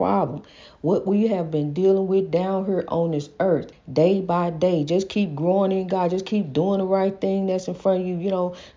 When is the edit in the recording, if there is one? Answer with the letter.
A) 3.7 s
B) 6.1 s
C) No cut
A